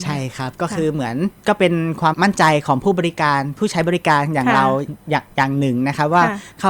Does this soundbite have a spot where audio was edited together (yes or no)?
yes